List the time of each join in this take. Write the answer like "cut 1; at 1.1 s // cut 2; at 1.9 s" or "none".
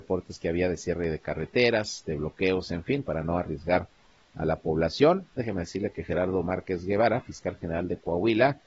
cut 1; at 3.0 s // cut 2; at 5.4 s